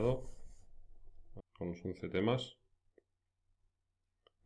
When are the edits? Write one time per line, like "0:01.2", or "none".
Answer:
0:01.4